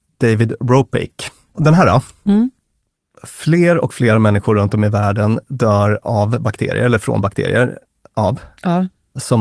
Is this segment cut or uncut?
cut